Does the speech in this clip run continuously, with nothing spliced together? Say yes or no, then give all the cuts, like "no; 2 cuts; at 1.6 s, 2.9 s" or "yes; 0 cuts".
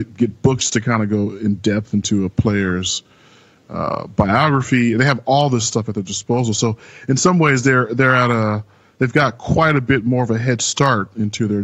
yes; 0 cuts